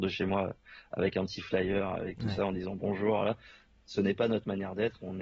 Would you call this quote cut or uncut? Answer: uncut